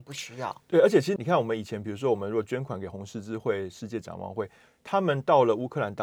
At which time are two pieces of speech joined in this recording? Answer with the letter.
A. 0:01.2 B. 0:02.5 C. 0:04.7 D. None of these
A